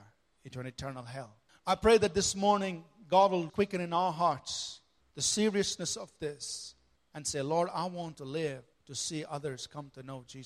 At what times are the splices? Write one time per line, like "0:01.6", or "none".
0:03.5
0:08.7